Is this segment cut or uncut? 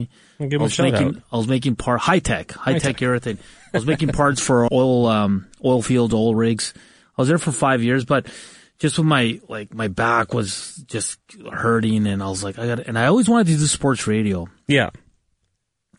cut